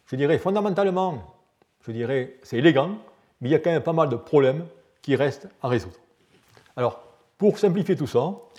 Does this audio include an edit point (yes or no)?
no